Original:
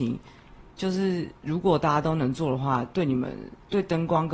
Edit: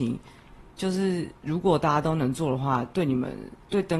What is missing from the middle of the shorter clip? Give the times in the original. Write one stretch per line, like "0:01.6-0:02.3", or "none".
none